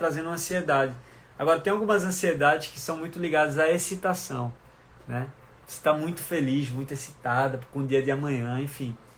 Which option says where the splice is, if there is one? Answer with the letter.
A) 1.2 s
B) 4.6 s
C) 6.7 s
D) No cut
D